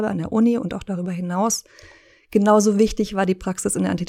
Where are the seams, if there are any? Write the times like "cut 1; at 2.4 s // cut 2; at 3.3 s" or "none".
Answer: none